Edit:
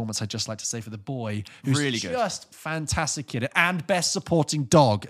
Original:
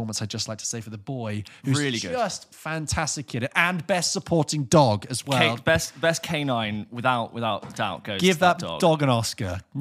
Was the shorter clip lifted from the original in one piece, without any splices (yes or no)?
yes